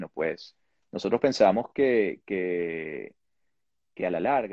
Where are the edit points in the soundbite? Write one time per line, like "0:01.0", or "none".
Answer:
none

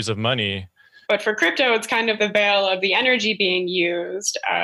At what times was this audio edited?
0:01.0
0:02.2

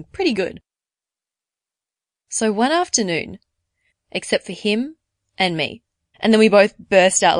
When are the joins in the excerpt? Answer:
0:03.9
0:06.1

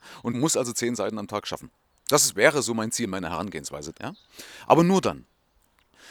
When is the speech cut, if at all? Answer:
0:03.9

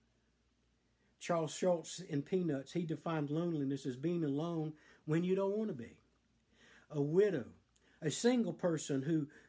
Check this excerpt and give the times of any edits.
0:08.0

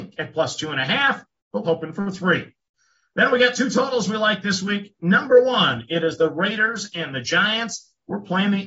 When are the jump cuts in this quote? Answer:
0:01.6

